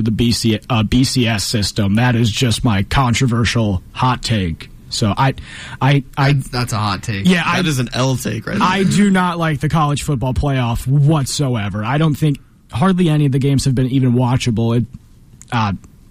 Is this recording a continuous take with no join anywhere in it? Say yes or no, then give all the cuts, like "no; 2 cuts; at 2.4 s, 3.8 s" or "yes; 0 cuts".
yes; 0 cuts